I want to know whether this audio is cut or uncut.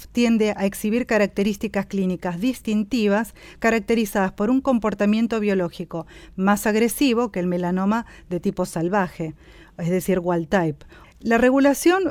cut